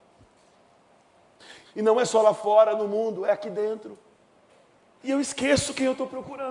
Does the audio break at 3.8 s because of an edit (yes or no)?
no